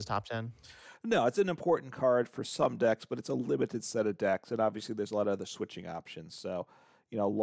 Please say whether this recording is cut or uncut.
uncut